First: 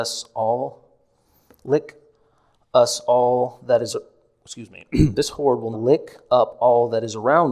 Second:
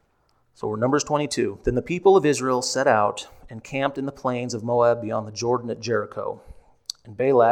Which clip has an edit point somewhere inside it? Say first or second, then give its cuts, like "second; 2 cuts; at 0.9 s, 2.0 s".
first; 1 cut; at 5.7 s